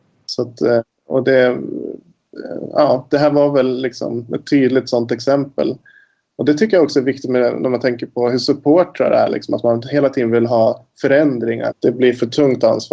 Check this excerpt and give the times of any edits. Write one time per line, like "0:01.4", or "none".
0:11.7